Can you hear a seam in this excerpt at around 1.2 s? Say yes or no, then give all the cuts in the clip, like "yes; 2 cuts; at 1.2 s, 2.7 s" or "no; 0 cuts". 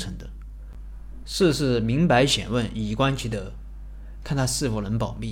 yes; 2 cuts; at 1.2 s, 4.2 s